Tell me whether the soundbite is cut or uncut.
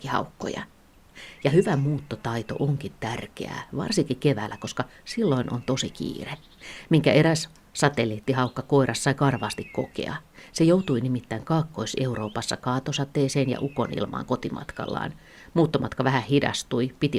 uncut